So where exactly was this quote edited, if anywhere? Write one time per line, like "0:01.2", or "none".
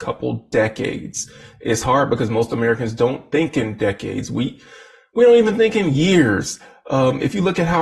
none